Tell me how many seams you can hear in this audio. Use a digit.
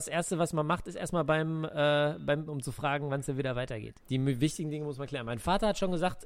2